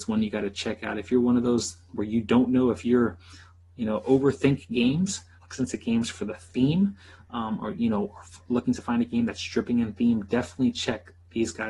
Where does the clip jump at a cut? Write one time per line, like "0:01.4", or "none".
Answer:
0:05.4